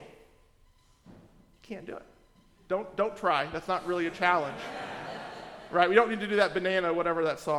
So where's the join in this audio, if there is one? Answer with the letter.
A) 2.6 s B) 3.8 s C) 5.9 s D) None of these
D